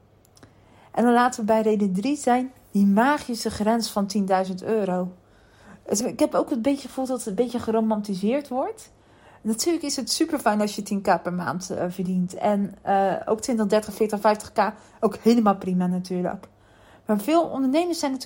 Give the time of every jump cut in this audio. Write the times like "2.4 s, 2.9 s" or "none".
6.0 s

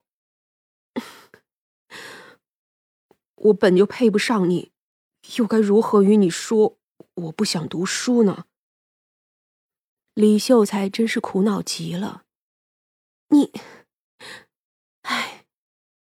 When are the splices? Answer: none

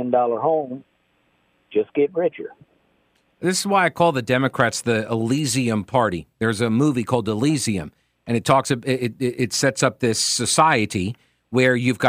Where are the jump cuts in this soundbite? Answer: none

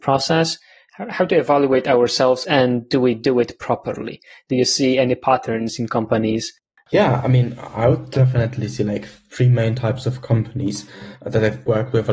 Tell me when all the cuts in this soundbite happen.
2.4 s

